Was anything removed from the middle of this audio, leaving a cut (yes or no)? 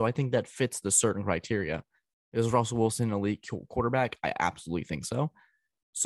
no